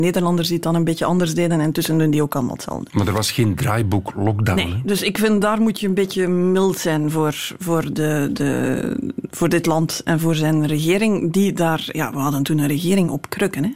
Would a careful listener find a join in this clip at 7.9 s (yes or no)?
yes